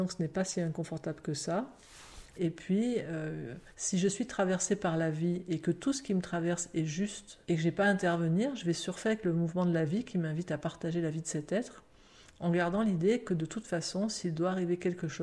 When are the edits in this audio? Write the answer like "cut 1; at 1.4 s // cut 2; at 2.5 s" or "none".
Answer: cut 1; at 2.4 s // cut 2; at 3.7 s // cut 3; at 7.4 s